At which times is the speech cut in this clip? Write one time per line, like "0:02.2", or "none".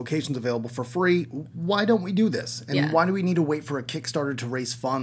none